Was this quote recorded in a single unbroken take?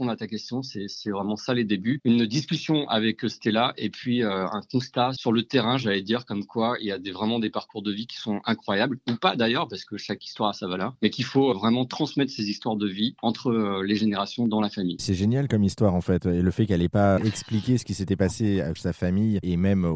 no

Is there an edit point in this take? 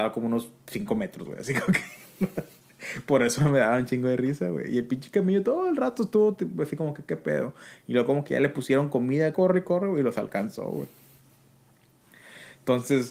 yes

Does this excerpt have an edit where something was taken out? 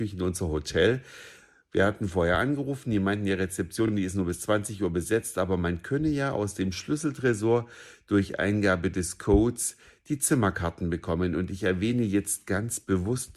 no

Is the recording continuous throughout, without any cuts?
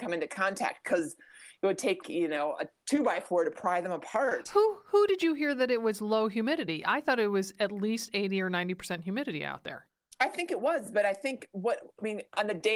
no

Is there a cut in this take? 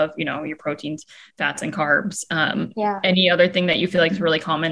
no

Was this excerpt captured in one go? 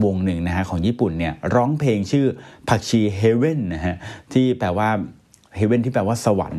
yes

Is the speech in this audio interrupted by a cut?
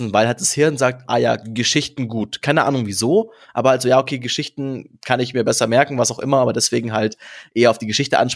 no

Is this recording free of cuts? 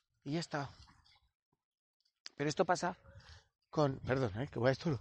yes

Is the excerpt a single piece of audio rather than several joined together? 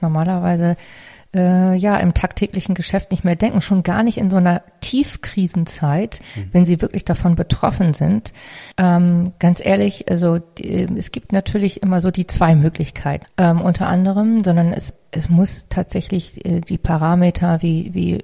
no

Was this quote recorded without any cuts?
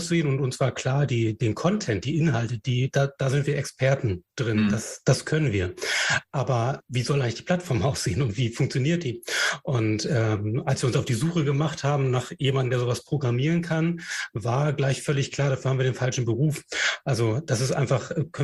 no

